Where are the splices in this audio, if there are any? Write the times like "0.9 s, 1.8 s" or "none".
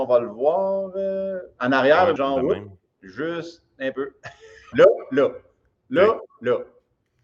2.2 s, 4.7 s